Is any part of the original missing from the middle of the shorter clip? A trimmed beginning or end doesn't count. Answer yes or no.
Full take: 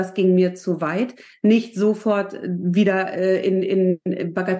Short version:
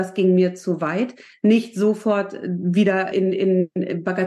yes